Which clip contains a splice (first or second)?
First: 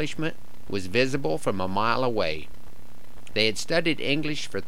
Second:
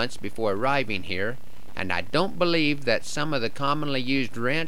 first